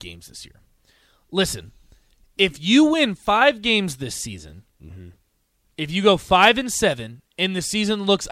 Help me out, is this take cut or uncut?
uncut